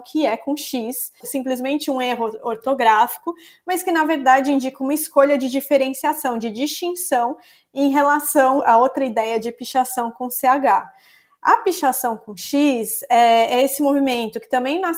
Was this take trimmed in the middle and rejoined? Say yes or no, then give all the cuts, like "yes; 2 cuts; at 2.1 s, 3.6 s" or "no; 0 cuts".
yes; 1 cut; at 1.2 s